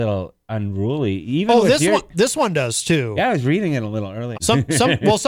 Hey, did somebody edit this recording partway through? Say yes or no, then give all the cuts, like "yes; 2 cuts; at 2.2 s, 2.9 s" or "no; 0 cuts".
yes; 1 cut; at 4.3 s